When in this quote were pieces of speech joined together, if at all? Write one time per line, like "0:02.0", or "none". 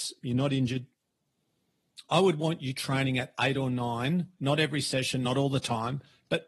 none